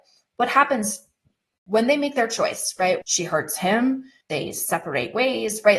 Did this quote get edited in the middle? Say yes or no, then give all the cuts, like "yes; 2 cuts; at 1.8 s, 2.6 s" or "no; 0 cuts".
yes; 2 cuts; at 3.0 s, 4.2 s